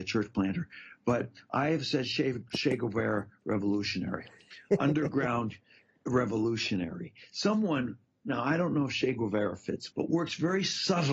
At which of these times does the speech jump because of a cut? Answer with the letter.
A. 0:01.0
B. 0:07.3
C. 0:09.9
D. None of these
C